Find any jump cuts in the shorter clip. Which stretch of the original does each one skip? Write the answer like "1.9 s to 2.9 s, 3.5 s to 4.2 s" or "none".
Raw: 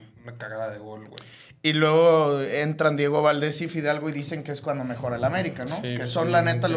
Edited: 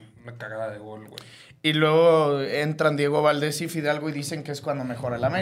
none